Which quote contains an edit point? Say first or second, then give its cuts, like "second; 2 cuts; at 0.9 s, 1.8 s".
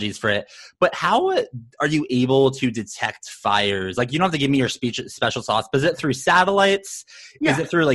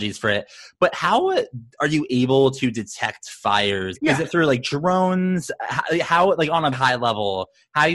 second; 2 cuts; at 3.9 s, 6.7 s